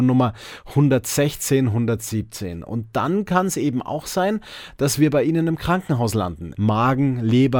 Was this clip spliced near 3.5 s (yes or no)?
no